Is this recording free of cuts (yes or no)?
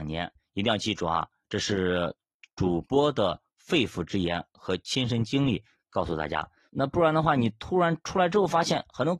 no